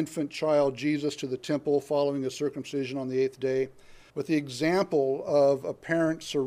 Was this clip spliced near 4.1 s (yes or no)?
yes